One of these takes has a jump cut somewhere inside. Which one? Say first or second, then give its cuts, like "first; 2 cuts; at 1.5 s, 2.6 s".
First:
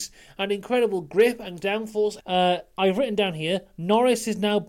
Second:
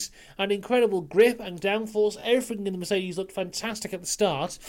first; 1 cut; at 2.2 s